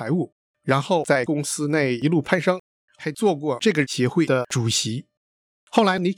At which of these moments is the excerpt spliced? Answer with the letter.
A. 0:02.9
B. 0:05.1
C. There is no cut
A